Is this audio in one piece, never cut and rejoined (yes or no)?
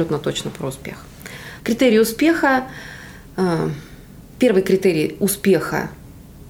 no